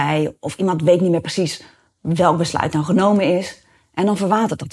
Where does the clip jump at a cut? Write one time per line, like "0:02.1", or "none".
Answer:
none